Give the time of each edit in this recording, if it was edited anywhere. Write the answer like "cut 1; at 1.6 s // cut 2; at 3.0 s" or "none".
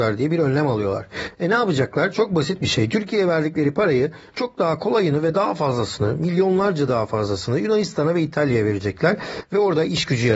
none